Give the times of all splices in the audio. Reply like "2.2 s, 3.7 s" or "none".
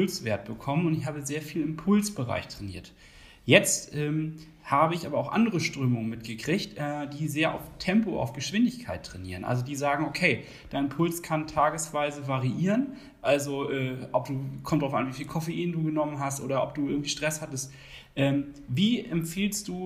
none